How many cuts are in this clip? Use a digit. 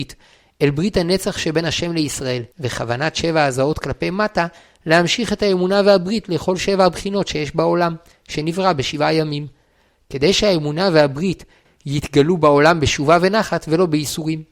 2